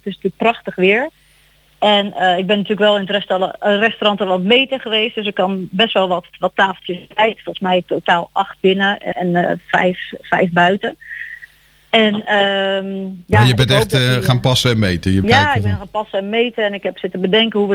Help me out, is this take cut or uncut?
cut